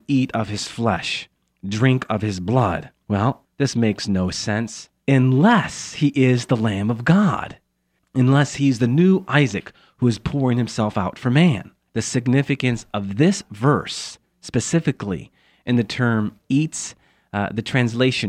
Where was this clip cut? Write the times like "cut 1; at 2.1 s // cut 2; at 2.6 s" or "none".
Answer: cut 1; at 11.9 s